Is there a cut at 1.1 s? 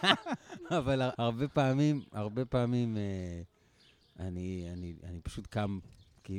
yes; 1 cut; at 1.1 s

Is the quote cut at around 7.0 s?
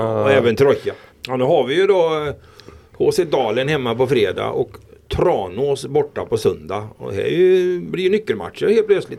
no; 1 cut; at 1.1 s

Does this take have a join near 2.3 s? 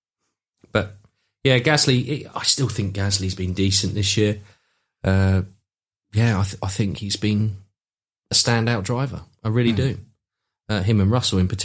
yes; 1 cut; at 2.3 s

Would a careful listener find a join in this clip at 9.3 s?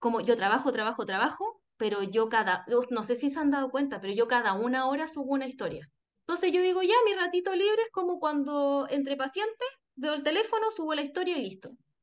no; 1 cut; at 6.0 s

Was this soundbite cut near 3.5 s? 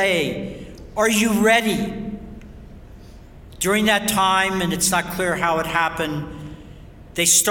yes; 1 cut; at 3.5 s

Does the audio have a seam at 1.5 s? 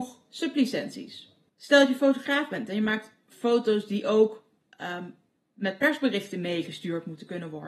yes; 1 cut; at 1.5 s

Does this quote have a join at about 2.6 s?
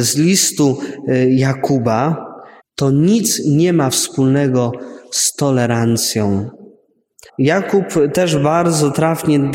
yes; 2 cuts; at 2.6 s, 7.3 s

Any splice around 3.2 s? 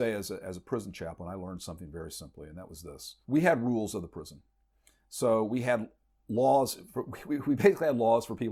yes; 1 cut; at 3.2 s

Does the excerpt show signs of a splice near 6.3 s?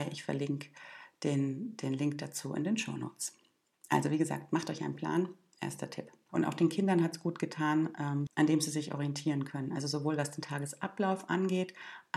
yes; 2 cuts; at 6.3 s, 8.3 s

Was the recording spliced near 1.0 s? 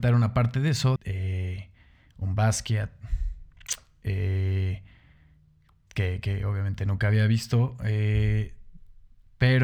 yes; 1 cut; at 1.0 s

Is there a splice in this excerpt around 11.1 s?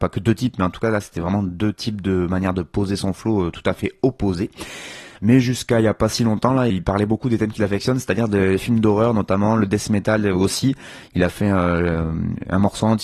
no; 2 cuts; at 5.2 s, 6.7 s

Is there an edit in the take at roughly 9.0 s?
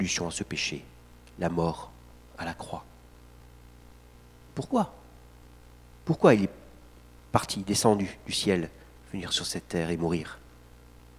no; 0 cuts

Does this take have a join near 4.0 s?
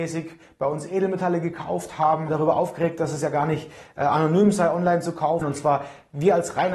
no; 2 cuts; at 2.3 s, 5.4 s

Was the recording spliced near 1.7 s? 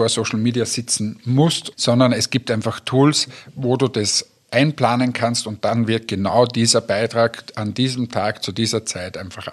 yes; 1 cut; at 1.7 s

